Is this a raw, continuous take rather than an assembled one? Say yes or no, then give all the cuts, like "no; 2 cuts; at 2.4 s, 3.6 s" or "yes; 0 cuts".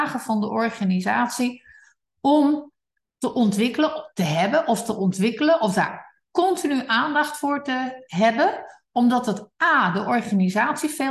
yes; 0 cuts